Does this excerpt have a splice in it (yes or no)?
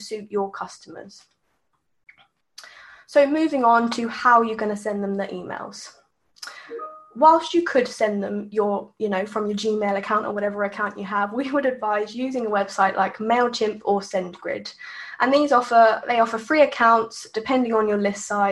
no